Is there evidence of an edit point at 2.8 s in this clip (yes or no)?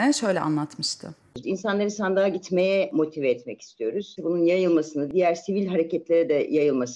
no